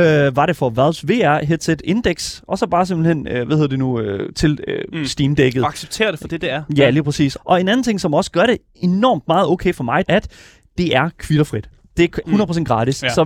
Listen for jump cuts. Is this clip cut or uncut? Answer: cut